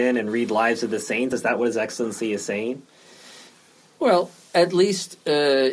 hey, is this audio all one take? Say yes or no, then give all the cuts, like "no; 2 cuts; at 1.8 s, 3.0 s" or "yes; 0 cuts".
yes; 0 cuts